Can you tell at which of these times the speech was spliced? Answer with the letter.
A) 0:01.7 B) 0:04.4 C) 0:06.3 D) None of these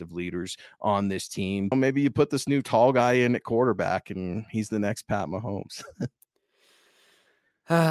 A